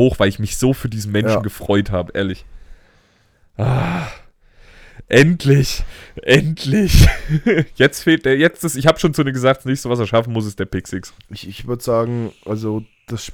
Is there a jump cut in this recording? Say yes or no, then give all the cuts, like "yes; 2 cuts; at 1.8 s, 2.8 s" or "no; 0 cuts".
no; 0 cuts